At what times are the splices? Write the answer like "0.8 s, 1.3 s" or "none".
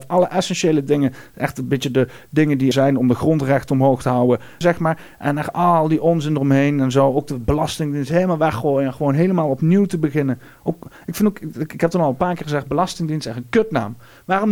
2.7 s, 4.6 s